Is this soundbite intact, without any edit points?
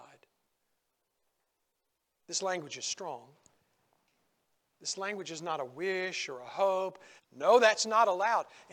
no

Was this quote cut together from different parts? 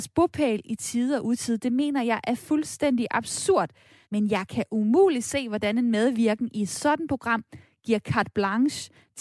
yes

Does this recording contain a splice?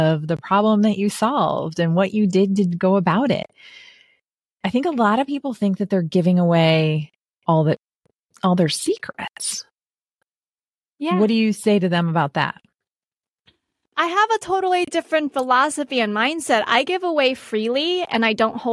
no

